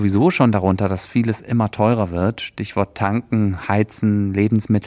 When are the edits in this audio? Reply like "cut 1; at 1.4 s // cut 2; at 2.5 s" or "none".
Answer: none